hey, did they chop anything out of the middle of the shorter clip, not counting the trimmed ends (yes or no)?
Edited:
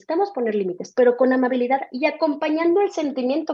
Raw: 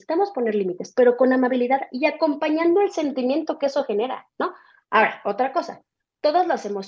no